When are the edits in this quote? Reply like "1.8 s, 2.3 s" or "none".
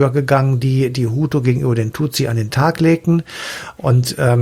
none